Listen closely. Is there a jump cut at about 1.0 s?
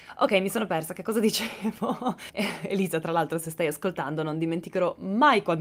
no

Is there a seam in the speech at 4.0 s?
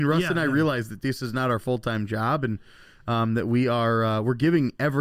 no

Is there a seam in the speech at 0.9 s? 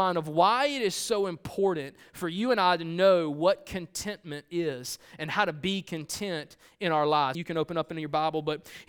no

